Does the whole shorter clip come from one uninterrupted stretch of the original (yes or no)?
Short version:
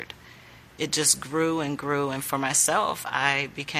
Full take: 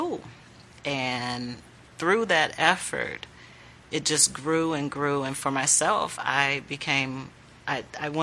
yes